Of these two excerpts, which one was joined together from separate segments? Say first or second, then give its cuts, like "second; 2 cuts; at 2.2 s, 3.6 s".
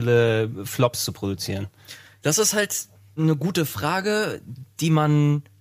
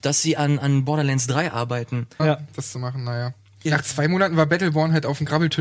second; 2 cuts; at 2.2 s, 3.7 s